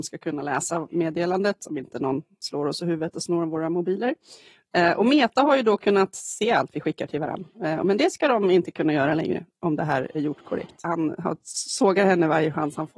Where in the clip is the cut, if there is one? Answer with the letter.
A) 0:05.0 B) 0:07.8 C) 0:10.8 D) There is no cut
C